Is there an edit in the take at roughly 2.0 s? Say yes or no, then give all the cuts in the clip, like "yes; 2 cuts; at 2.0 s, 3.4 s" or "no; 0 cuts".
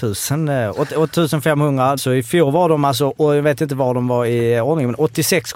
yes; 1 cut; at 2.0 s